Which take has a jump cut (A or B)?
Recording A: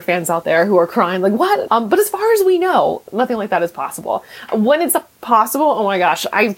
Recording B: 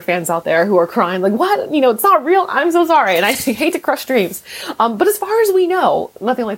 A